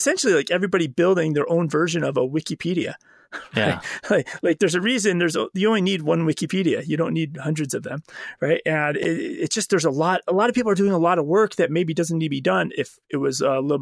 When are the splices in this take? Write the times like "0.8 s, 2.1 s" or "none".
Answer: none